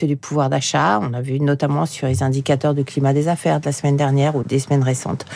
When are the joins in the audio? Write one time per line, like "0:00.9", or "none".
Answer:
0:04.4